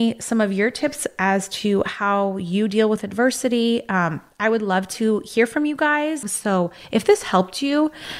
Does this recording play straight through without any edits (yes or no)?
no